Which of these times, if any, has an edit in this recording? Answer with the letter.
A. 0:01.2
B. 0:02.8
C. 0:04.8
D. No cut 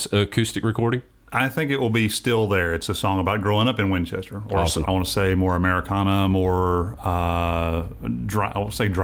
C